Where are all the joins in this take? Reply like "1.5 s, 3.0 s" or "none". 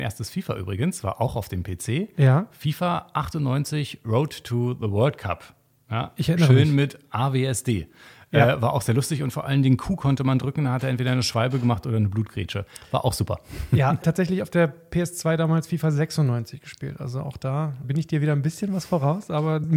14.0 s, 17.8 s